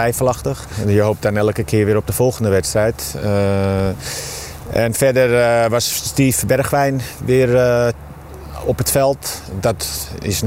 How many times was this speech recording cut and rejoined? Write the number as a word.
zero